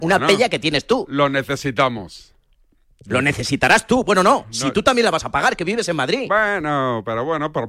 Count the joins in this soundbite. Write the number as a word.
zero